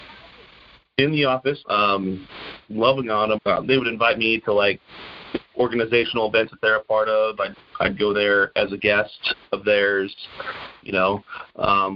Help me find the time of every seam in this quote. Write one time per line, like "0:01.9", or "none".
0:01.6
0:03.4

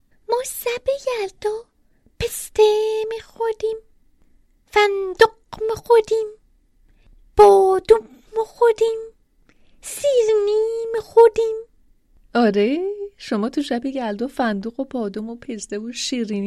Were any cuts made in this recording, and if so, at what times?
none

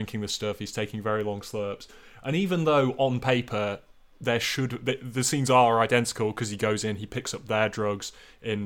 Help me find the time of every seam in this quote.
none

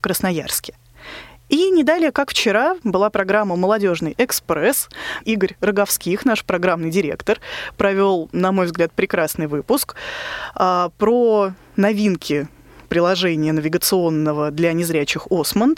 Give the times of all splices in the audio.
0:05.2

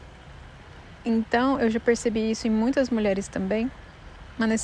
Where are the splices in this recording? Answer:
none

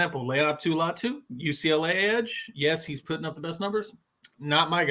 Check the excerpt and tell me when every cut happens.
none

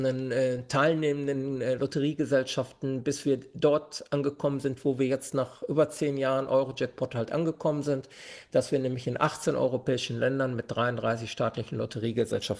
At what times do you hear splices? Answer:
none

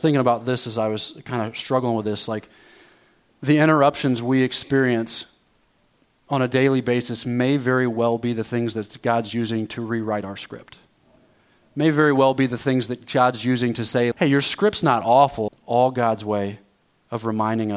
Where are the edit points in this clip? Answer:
0:14.1
0:15.5

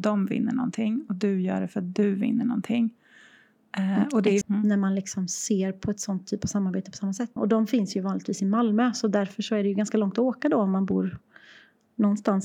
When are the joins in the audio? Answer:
0:04.4
0:07.4

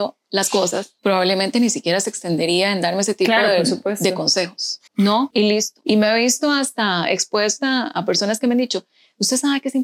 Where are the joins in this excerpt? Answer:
0:01.0
0:04.9

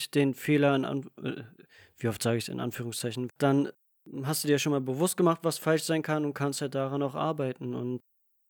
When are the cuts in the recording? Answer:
0:03.3

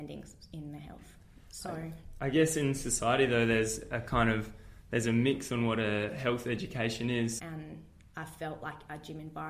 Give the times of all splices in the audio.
0:07.4

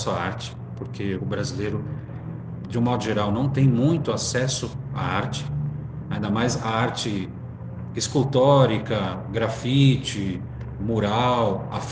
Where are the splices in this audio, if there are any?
0:01.2

